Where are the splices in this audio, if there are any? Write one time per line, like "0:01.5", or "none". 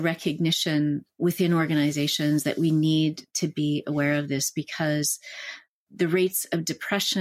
none